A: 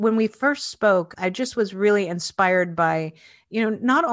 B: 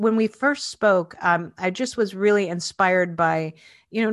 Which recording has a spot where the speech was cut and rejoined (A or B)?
A